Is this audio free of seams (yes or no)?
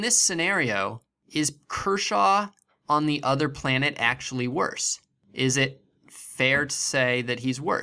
yes